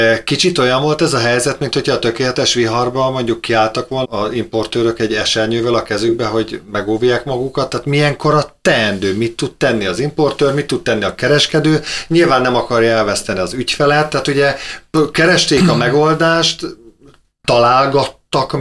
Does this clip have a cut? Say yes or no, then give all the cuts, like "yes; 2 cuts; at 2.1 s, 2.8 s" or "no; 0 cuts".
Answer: yes; 1 cut; at 4.0 s